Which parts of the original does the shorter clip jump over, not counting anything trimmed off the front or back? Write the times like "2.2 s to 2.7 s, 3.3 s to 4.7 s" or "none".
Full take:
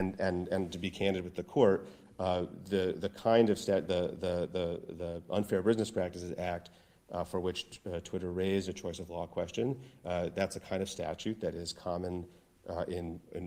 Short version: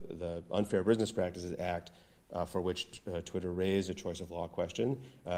none